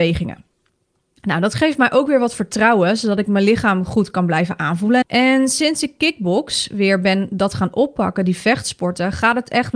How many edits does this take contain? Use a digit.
1